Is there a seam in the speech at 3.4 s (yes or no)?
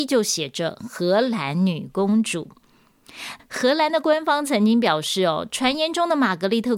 yes